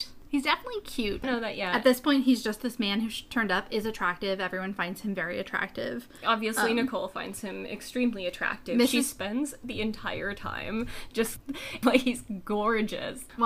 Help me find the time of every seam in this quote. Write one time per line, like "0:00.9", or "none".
0:01.2
0:11.8